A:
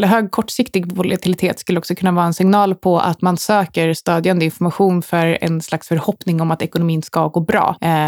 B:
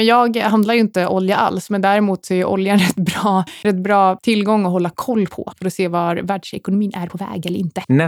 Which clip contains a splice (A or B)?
B